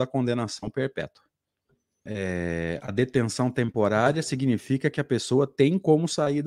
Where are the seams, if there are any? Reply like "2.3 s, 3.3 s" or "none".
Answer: 2.1 s